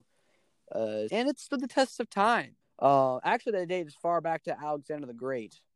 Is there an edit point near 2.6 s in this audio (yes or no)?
yes